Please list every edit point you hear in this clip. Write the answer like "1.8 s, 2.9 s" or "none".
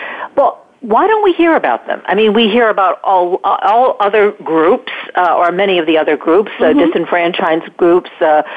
none